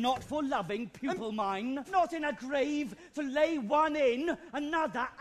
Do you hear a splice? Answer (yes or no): yes